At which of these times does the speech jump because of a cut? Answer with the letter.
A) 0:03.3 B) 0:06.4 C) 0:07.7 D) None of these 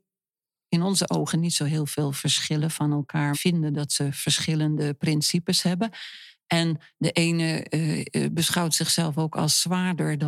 A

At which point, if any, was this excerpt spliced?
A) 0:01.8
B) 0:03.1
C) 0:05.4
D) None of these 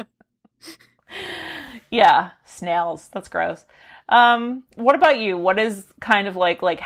D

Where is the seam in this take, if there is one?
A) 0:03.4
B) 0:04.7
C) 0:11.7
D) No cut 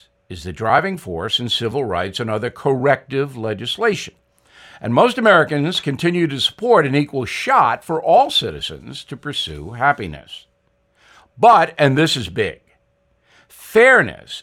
D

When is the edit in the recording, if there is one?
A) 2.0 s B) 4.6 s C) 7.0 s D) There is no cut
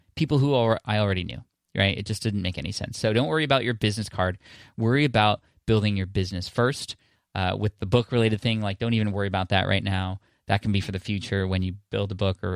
D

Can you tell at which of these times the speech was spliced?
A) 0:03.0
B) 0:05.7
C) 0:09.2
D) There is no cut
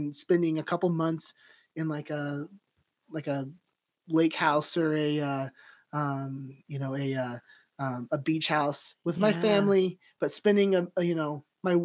D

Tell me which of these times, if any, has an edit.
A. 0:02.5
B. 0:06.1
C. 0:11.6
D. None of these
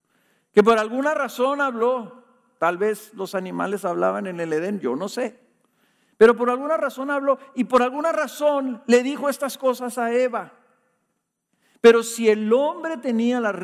D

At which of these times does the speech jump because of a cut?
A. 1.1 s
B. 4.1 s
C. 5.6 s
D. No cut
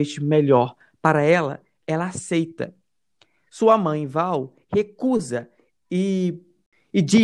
D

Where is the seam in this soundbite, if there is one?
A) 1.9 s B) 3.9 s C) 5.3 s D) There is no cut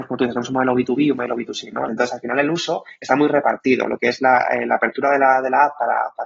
A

